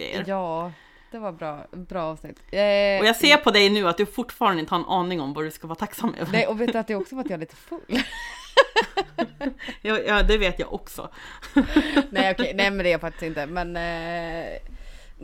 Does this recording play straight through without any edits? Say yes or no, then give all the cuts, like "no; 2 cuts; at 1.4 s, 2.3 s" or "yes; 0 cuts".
yes; 0 cuts